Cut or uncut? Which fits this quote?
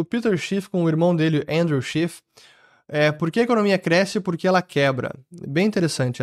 uncut